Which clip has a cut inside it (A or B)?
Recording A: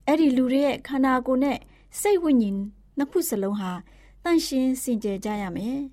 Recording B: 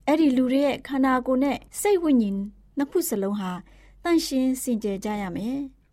B